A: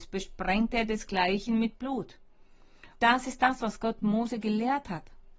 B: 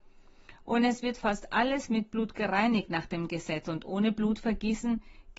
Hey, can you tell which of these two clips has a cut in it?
A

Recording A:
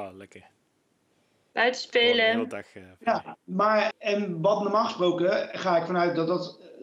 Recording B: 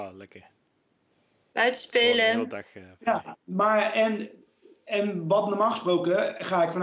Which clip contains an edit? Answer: A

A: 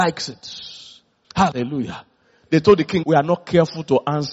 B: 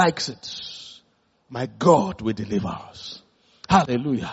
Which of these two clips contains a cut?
A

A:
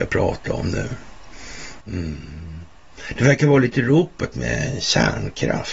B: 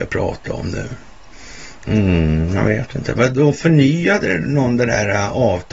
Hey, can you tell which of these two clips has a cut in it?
A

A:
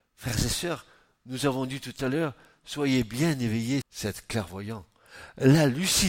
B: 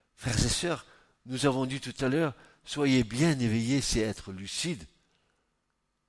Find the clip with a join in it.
A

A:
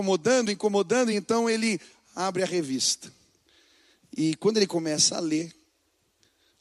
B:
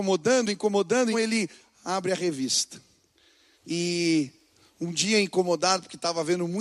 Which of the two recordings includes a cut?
B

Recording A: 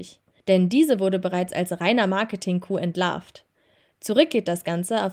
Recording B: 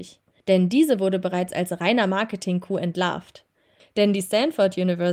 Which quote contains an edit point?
B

